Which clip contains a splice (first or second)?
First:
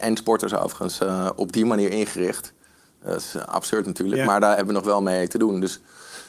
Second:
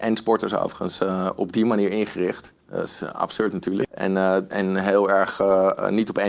second